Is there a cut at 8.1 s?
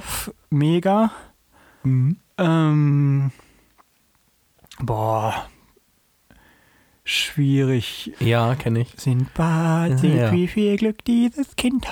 yes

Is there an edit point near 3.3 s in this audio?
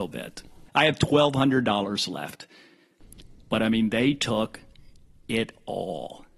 no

